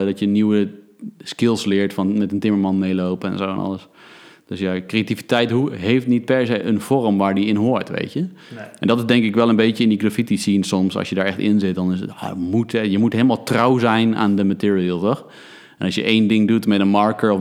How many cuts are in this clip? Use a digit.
0